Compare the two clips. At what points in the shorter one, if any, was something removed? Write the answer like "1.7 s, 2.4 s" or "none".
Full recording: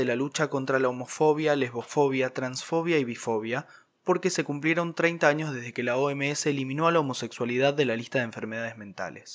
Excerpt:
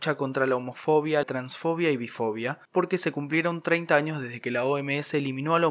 1.2 s, 2.7 s